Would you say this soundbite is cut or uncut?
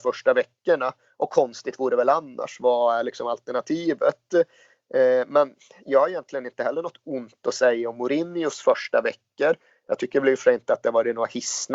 uncut